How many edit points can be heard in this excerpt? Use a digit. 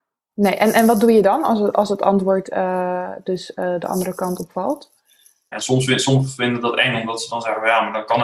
1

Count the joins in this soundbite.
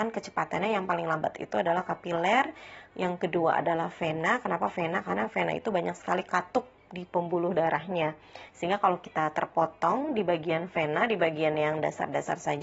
1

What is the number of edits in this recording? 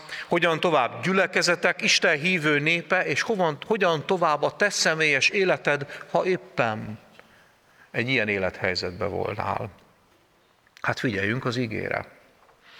0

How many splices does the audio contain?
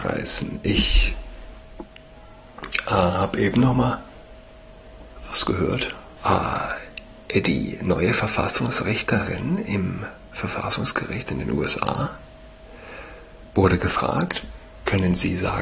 1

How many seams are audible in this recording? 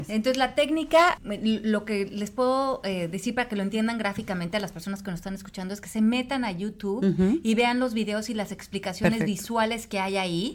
1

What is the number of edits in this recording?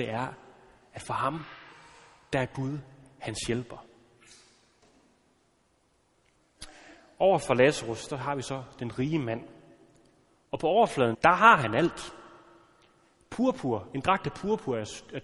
1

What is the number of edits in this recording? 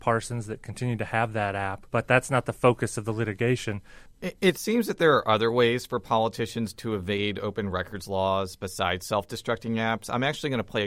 1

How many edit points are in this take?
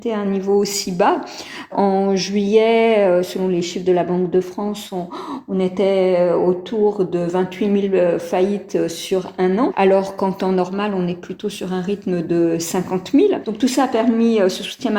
0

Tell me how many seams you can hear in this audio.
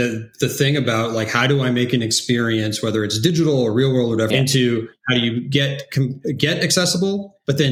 1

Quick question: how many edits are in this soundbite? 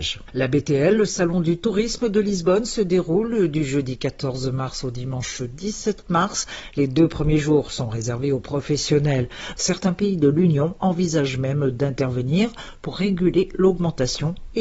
1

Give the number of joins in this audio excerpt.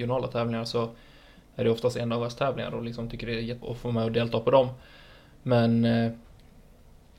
1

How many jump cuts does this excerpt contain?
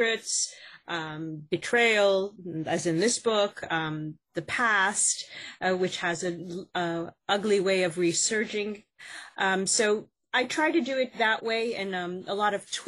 0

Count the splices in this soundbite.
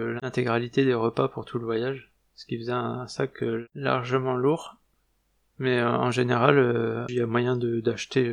1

